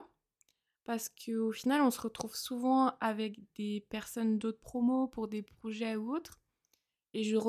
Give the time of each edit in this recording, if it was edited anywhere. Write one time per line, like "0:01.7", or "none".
none